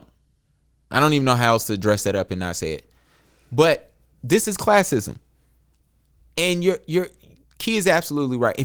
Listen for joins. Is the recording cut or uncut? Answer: uncut